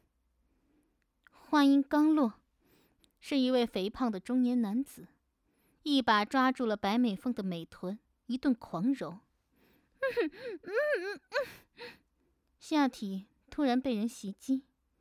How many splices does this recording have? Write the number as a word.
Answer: one